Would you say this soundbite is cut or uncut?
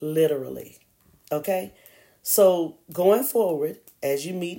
uncut